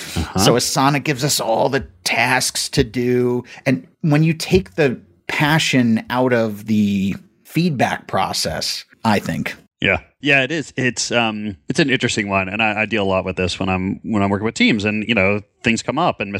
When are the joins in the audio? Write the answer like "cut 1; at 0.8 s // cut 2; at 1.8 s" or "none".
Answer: cut 1; at 8.9 s